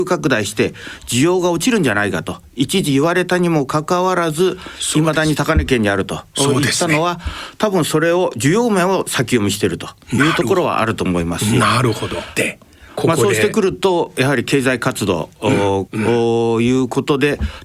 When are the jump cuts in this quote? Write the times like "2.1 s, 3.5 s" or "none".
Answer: 12.4 s, 15.9 s